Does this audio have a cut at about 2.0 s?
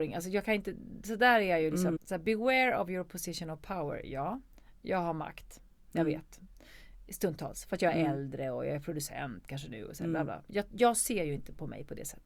yes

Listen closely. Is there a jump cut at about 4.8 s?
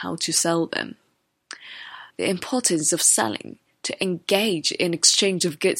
no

